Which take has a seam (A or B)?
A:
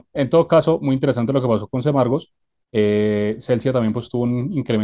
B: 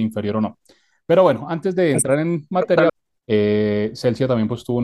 B